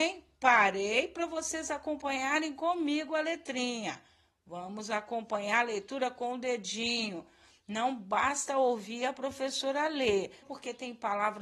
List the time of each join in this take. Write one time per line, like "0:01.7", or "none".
0:10.4